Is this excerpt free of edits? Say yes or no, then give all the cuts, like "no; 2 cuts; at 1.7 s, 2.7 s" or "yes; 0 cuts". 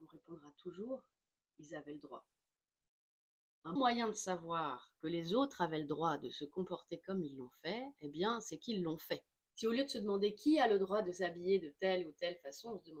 no; 2 cuts; at 3.8 s, 9.5 s